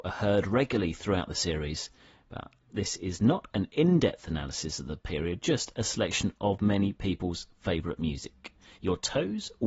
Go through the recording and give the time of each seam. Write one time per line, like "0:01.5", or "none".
none